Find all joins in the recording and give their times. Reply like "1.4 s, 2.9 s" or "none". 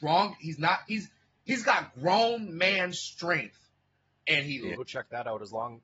4.7 s